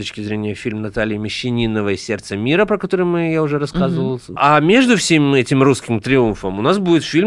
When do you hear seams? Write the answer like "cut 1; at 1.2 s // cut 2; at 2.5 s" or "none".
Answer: cut 1; at 4.4 s